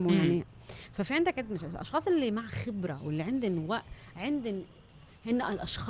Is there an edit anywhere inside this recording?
no; 0 cuts

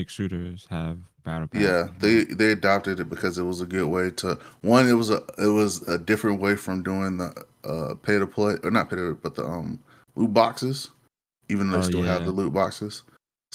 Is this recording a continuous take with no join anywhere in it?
yes; 0 cuts

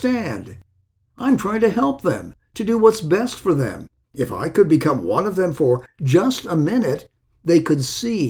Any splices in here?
yes; 1 cut; at 4.0 s

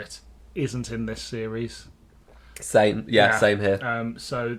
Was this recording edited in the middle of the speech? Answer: no; 0 cuts

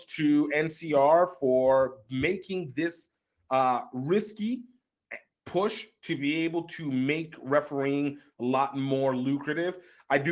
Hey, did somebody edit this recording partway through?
no; 0 cuts

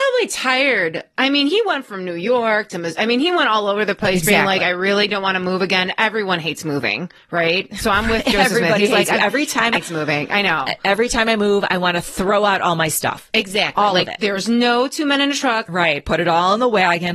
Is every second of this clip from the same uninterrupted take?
no; 1 cut; at 9.7 s

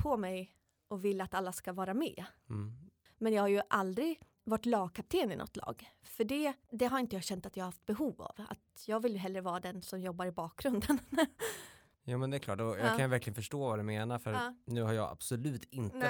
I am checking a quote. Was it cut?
yes; 2 cuts; at 3.1 s, 6.7 s

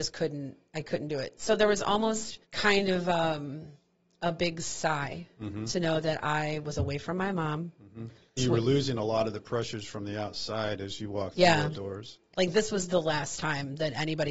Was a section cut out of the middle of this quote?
yes; 3 cuts; at 2.4 s, 8.4 s, 12.3 s

